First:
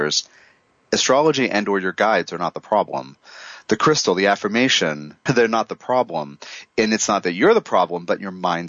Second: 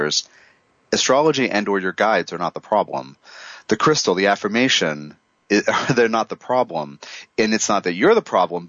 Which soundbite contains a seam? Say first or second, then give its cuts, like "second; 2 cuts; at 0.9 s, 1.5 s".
first; 1 cut; at 5.3 s